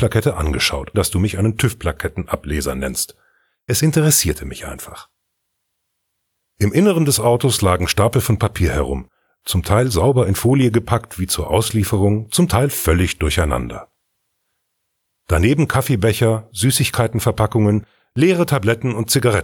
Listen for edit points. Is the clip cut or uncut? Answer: cut